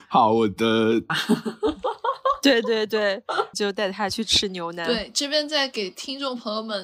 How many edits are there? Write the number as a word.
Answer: two